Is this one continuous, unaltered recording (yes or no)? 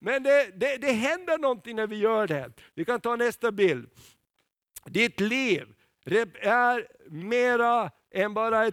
yes